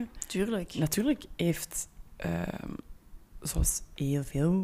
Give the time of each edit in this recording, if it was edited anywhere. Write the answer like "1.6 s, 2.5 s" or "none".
none